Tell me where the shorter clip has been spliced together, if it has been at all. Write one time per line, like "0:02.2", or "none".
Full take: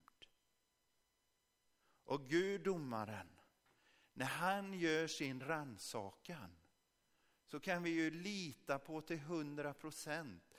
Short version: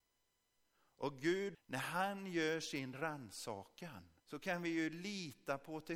0:01.5
0:04.2